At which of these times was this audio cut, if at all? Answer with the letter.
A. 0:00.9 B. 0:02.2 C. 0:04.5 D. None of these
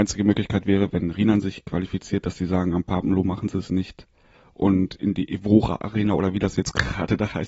D